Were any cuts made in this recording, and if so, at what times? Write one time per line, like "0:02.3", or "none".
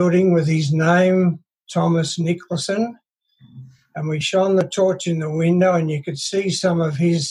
none